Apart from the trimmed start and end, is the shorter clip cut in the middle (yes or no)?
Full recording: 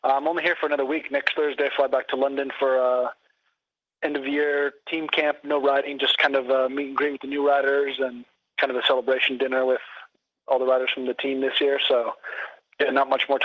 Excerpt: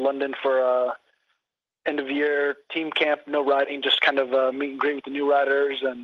no